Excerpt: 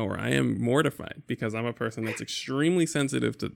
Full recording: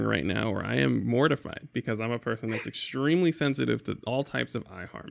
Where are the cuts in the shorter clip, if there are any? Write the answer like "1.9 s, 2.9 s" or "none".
none